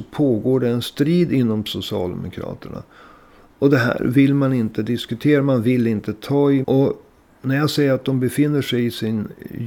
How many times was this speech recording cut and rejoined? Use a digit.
2